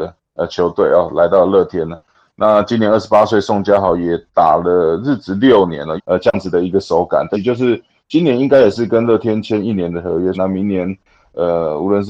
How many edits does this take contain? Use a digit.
3